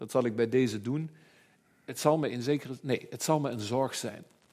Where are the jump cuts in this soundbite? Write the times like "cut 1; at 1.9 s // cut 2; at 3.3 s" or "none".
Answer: none